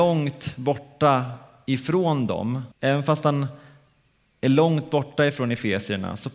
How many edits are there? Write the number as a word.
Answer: one